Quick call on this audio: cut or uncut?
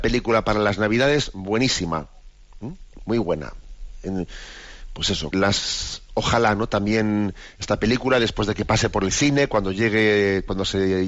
cut